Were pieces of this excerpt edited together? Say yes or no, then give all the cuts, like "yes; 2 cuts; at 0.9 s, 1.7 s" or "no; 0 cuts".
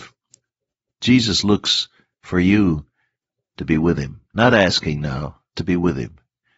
yes; 2 cuts; at 4.3 s, 5.5 s